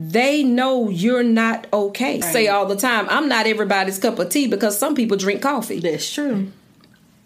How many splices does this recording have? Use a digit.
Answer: 1